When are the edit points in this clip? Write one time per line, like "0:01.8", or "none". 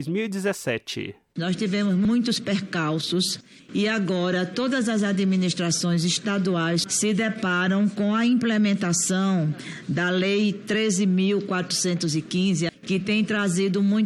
0:06.8
0:12.7